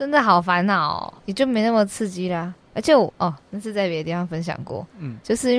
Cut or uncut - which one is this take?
cut